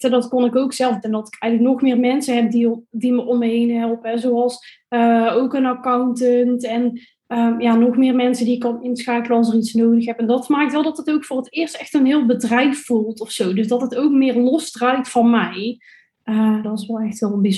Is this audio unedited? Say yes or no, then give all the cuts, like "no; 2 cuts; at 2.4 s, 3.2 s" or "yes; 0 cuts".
no; 2 cuts; at 1.0 s, 16.6 s